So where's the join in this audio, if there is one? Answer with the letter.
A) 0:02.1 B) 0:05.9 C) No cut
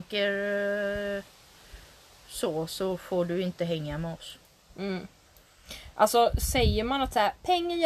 C